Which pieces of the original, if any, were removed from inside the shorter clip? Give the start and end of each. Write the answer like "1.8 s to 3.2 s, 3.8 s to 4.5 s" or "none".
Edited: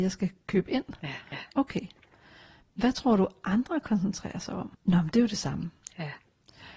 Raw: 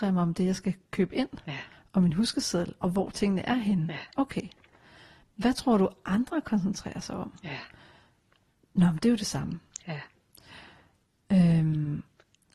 1.8 s to 3.9 s, 7.4 s to 8.6 s